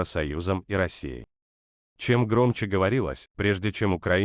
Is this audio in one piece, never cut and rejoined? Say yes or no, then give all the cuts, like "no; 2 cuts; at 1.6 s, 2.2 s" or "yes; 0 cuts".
no; 1 cut; at 3.3 s